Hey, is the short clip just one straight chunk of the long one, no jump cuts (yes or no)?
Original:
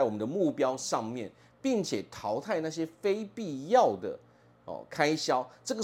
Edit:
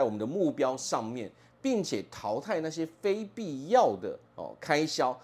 no